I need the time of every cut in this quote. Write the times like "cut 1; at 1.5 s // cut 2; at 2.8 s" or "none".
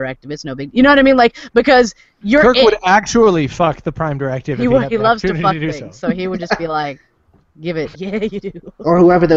cut 1; at 7.9 s

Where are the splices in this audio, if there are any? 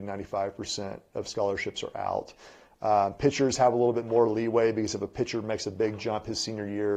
none

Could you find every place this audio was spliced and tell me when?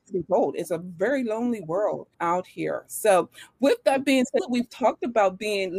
cut 1; at 2.1 s // cut 2; at 4.4 s

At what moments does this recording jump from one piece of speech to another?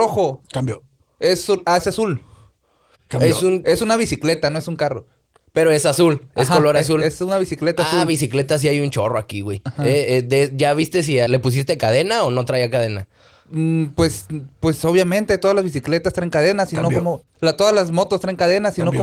cut 1; at 11.3 s

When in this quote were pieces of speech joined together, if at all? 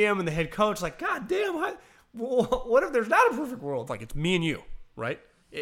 cut 1; at 3.9 s

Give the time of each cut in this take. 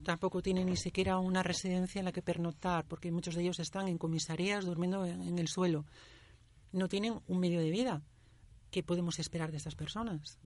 none

